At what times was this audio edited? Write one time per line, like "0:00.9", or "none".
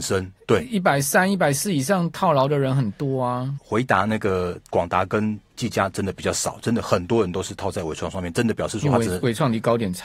0:03.6

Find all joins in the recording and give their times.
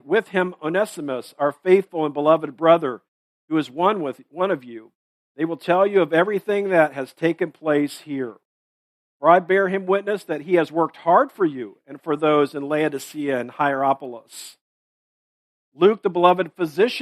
0:09.0

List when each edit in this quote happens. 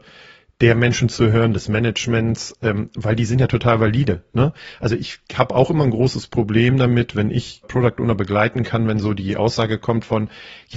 0:07.6

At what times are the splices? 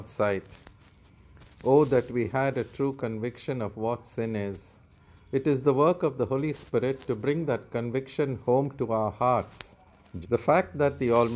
0:10.2

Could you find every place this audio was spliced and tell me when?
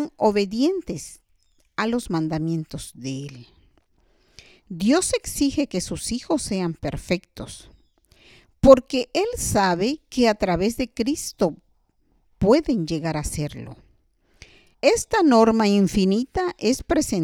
0:14.7

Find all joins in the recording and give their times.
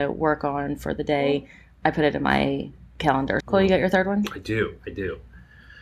0:03.4

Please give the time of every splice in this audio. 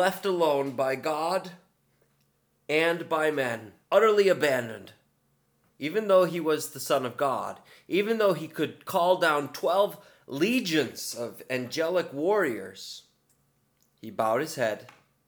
0:03.8
0:05.7

